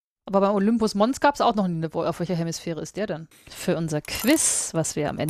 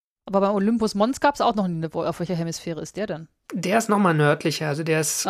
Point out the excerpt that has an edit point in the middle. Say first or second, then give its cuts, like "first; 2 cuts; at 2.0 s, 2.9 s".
first; 1 cut; at 3.3 s